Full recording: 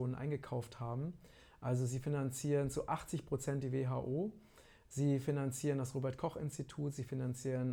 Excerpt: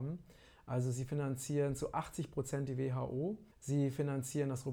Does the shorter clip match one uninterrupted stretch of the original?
no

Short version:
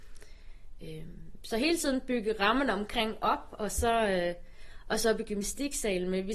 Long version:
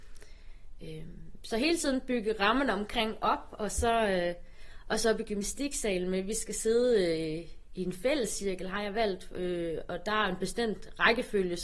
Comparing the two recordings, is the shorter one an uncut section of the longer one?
yes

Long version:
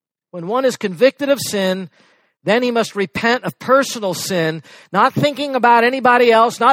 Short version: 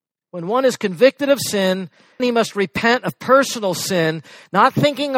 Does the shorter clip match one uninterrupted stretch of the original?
no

